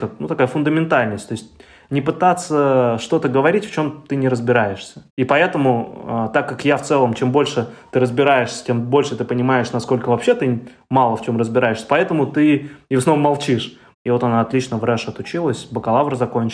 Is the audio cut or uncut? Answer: cut